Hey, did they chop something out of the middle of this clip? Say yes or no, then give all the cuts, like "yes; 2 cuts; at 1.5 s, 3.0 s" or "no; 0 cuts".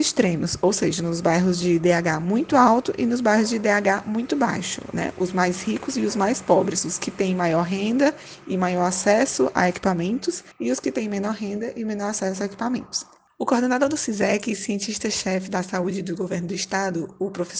yes; 1 cut; at 10.5 s